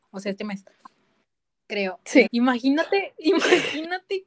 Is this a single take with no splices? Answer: no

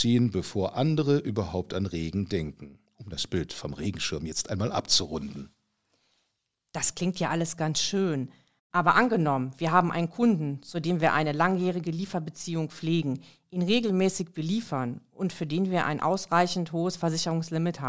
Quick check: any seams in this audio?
no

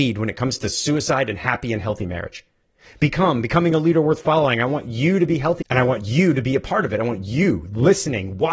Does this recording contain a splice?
yes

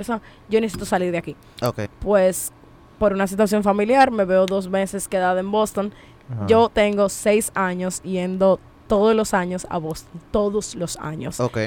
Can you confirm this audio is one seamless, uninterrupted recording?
no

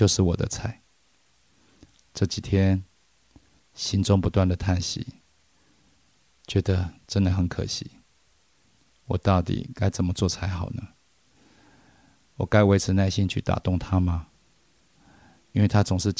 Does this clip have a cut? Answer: yes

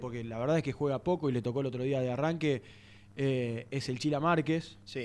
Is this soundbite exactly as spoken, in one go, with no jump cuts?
yes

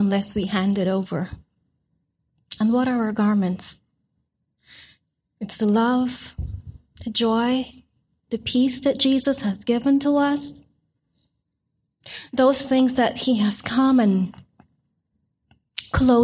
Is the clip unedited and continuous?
yes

